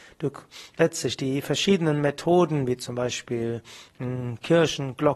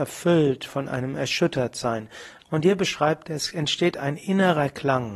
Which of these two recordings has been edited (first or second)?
second